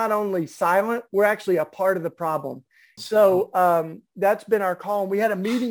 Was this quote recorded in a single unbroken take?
no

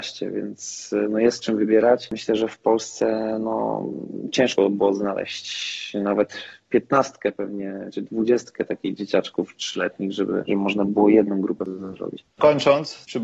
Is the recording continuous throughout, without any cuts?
yes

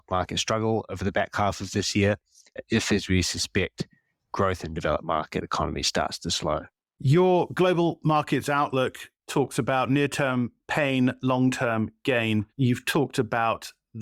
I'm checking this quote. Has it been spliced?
yes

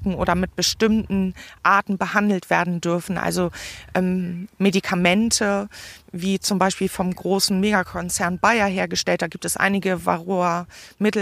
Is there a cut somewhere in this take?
no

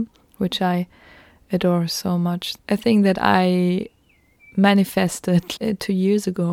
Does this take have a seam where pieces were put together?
yes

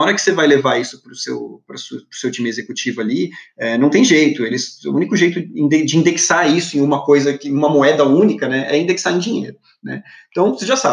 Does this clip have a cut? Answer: no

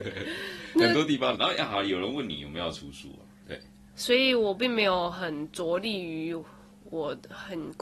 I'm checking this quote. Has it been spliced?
yes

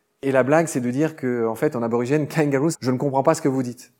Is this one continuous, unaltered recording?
no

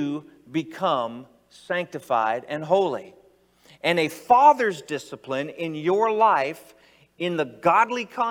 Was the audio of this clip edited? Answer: no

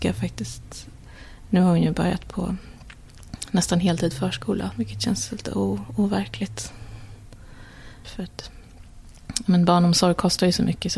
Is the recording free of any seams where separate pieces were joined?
no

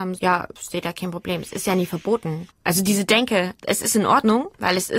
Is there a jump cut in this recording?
no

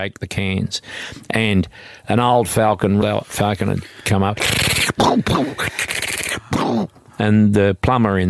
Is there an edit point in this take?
yes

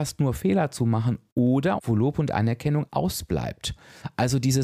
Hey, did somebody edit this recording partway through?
yes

